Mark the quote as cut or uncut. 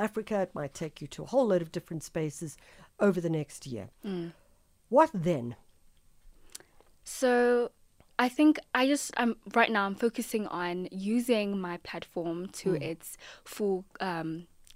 uncut